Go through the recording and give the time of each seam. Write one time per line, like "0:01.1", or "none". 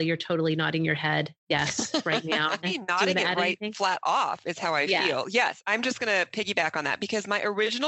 0:02.6